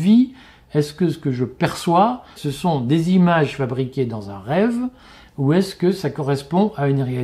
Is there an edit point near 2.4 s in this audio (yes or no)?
yes